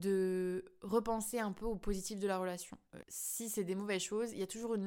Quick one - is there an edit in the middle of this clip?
yes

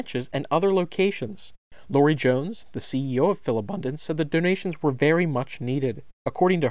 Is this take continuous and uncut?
yes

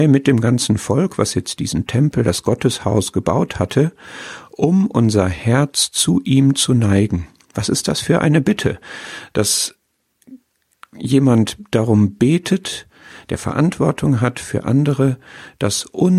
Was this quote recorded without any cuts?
yes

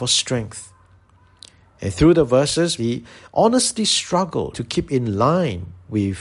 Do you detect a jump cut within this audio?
yes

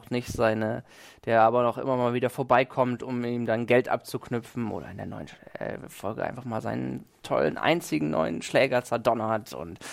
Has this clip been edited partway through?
no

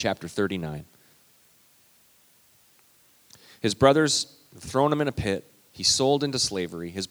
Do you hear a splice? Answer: no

